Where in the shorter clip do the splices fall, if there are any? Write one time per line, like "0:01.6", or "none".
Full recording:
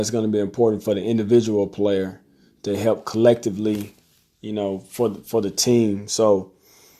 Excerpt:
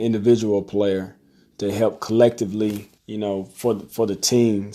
0:03.0